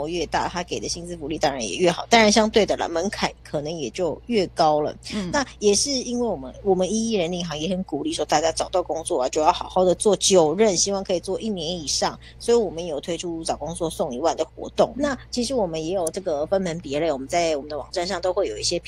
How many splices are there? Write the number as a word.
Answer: one